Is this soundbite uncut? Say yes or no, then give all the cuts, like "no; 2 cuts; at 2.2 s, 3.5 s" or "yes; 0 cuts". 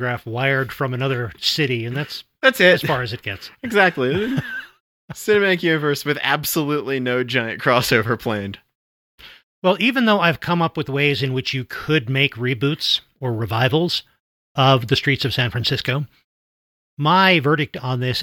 yes; 0 cuts